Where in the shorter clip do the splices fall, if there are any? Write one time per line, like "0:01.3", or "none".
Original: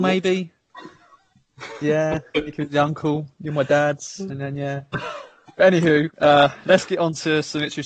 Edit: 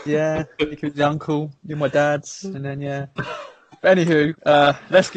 none